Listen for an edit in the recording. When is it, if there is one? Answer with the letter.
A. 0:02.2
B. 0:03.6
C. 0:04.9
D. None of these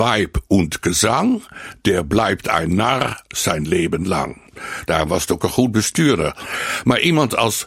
C